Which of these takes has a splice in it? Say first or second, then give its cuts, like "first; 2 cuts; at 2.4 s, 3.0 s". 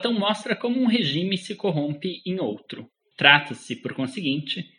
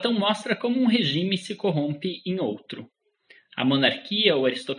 first; 1 cut; at 3.1 s